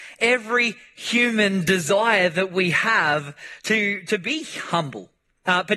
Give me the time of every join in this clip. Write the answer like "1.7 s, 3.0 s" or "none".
none